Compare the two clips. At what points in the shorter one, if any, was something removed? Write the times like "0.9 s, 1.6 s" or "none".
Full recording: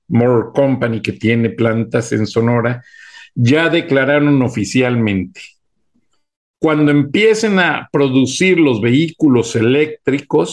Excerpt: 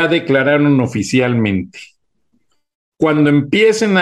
none